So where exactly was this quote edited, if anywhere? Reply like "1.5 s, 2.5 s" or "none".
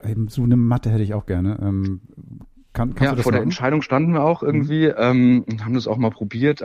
none